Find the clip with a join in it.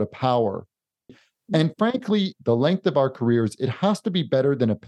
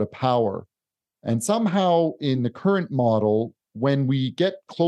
first; 2 cuts; at 1.1 s, 2.4 s

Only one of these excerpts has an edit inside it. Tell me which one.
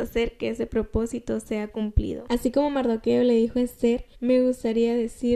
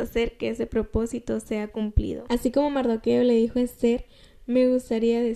first; 1 cut; at 4.1 s

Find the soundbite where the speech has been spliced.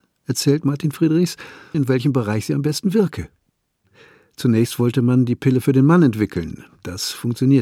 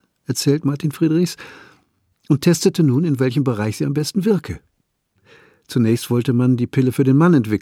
first; 1 cut; at 1.7 s

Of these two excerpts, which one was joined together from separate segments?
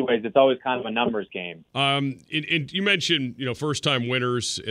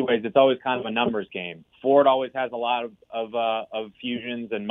first; 1 cut; at 1.7 s

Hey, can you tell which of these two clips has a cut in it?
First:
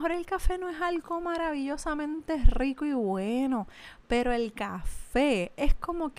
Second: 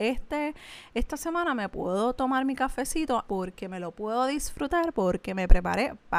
second; 1 cut; at 3.3 s

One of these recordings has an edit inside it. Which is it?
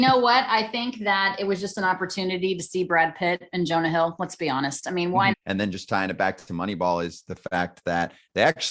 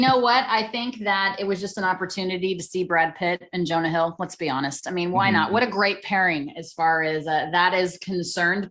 first; 1 cut; at 5.3 s

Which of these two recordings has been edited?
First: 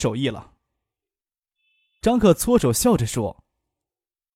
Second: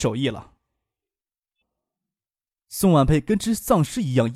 second; 1 cut; at 1.6 s

